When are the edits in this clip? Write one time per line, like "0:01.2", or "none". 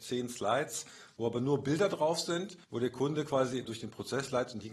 0:02.6
0:03.6